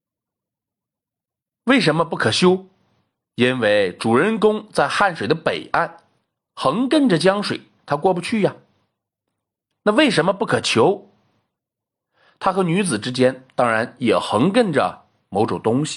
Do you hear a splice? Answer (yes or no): no